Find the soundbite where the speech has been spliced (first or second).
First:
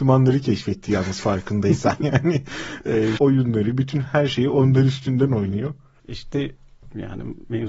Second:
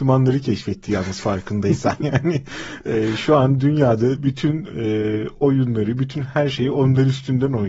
first